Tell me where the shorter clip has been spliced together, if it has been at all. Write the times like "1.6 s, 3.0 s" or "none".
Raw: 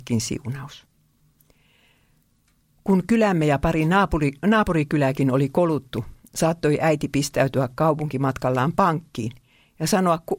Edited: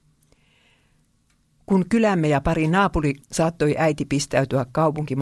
3.2 s